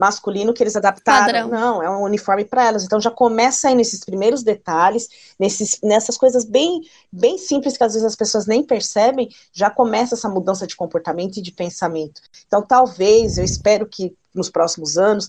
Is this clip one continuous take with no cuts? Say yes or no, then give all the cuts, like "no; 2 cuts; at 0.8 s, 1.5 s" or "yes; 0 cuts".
yes; 0 cuts